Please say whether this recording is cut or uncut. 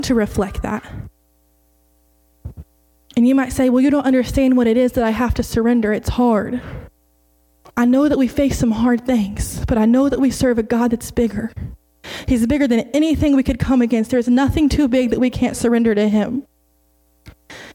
uncut